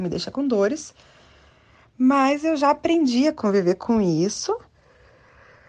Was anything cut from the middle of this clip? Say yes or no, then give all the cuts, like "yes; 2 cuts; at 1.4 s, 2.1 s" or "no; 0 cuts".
no; 0 cuts